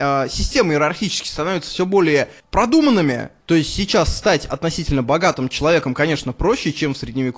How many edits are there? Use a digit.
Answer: 1